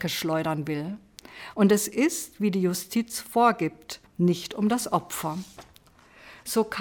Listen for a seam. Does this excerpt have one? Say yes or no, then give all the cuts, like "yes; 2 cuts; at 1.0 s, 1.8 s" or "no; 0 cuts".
yes; 2 cuts; at 1.5 s, 4.1 s